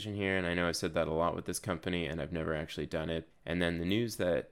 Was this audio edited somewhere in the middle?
yes; 1 cut; at 3.3 s

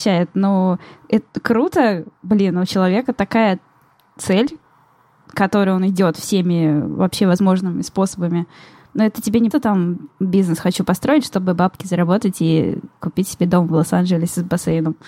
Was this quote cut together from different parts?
yes; 1 cut; at 9.5 s

